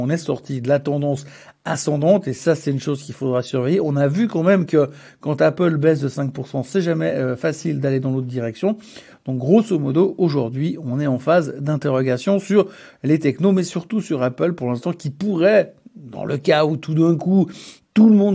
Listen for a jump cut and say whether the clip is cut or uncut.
uncut